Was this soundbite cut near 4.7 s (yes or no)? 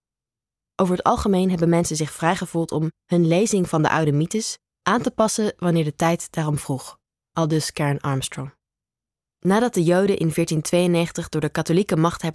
yes